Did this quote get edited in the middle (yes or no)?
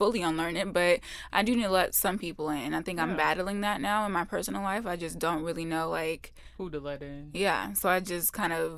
no